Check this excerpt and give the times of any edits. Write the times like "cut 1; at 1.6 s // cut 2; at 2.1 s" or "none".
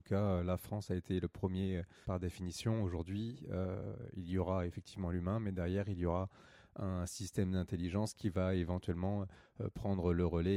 cut 1; at 2.0 s